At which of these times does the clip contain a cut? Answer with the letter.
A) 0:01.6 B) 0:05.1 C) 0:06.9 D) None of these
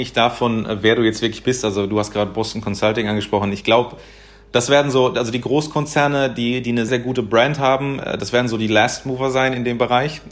C